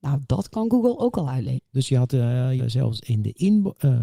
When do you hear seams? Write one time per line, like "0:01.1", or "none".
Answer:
0:01.6
0:02.6